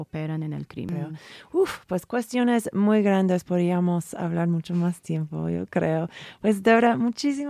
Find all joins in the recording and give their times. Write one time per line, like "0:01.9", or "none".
none